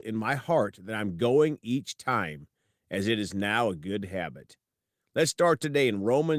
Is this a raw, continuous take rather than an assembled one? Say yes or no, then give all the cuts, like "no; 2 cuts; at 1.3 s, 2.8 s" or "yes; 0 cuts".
yes; 0 cuts